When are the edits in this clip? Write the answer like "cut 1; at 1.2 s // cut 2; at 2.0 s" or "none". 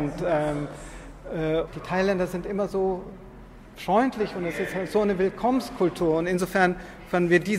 cut 1; at 1.7 s

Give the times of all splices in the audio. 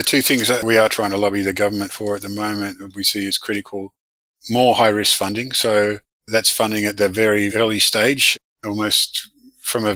cut 1; at 7.5 s

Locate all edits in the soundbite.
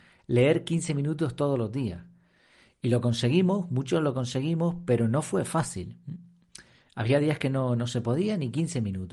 none

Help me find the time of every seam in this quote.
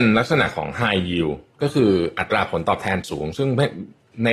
cut 1; at 1.5 s

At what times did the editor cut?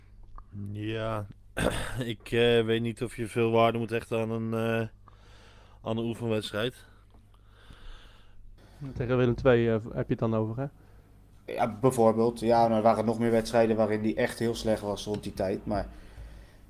cut 1; at 8.6 s

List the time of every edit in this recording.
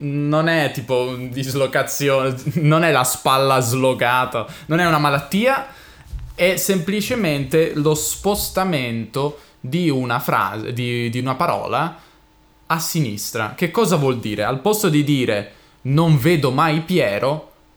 none

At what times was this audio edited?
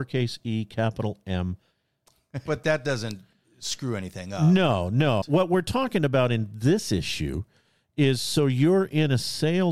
cut 1; at 2.5 s // cut 2; at 5.2 s

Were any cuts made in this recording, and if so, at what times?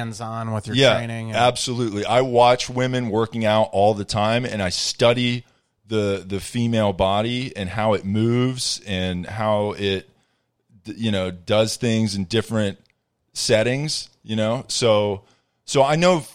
none

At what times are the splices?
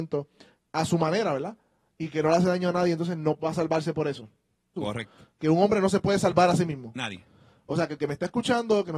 cut 1; at 4.8 s

